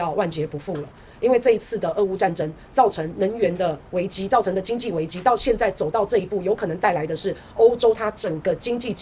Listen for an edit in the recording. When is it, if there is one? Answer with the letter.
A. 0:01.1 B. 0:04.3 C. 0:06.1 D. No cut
D